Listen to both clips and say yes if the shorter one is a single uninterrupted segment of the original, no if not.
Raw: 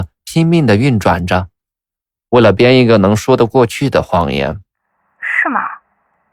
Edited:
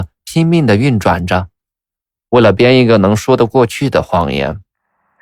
yes